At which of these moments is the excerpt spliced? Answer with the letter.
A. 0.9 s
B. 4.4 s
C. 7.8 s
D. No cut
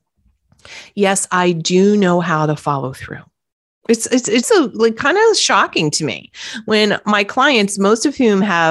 B